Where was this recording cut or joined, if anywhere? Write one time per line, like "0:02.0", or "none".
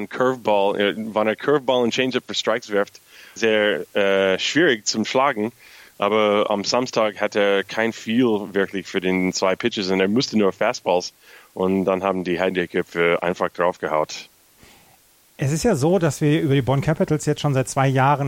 0:03.4